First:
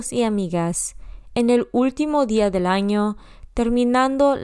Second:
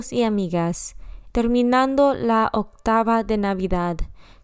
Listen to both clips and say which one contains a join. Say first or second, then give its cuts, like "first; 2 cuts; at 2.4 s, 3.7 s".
second; 1 cut; at 1.3 s